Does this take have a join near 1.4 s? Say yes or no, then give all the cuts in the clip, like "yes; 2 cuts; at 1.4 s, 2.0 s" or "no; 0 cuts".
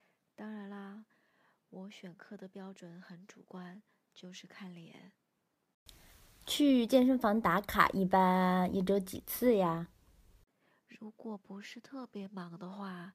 no; 0 cuts